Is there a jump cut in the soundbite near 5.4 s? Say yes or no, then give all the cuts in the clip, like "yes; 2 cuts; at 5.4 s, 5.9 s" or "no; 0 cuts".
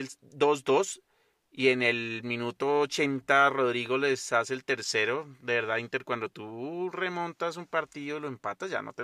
no; 0 cuts